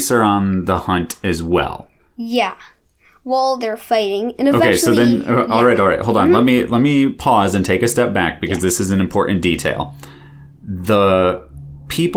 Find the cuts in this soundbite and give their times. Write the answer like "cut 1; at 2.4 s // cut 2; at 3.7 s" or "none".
none